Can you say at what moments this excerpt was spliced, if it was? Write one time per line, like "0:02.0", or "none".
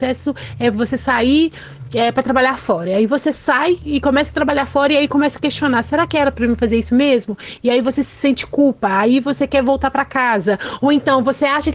none